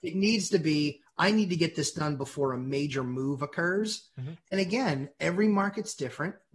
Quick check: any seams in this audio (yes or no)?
no